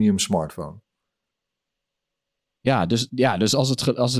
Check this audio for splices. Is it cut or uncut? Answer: uncut